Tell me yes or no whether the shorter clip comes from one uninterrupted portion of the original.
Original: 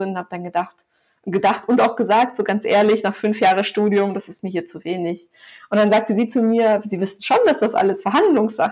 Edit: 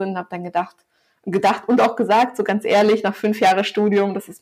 yes